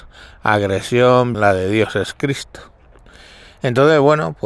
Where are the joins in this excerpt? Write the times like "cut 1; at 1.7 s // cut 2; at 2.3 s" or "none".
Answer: cut 1; at 1.3 s